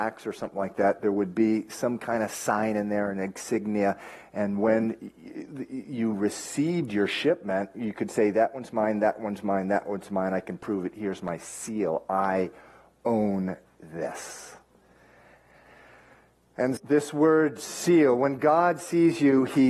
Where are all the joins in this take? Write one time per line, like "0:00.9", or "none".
0:16.8

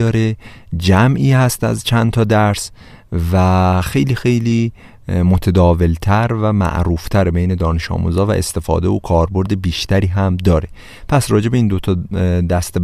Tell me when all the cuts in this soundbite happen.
none

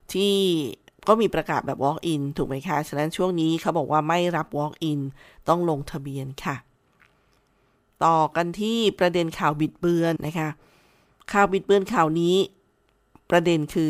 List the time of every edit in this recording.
0:10.2

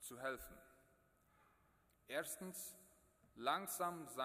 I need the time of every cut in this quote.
0:01.9

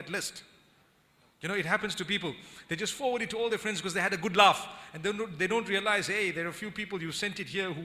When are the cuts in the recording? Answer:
none

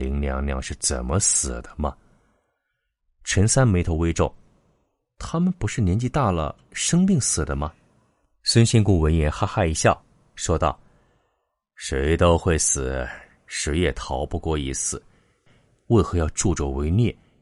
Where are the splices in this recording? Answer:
0:15.5

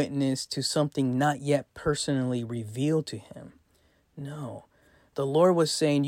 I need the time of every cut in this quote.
none

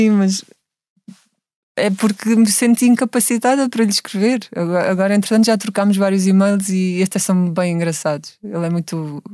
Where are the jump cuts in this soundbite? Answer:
none

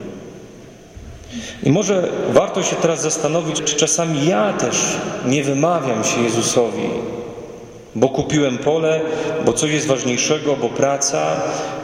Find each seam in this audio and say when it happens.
0:03.6

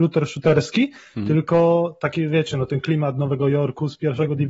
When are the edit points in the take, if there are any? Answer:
none

